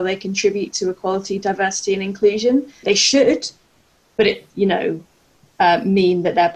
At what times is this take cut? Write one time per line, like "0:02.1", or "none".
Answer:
0:02.8
0:04.5

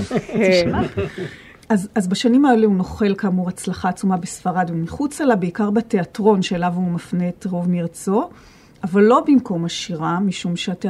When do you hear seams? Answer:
none

